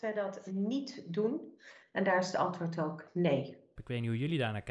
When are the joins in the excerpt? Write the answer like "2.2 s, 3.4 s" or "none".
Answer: 1.8 s, 3.8 s